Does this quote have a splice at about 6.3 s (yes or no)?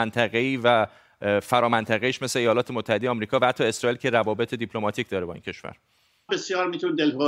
yes